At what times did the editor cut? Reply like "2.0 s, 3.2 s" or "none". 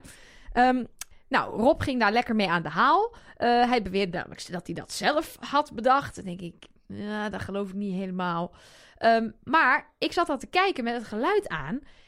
none